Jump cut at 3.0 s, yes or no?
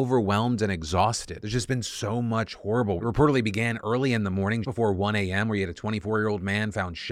yes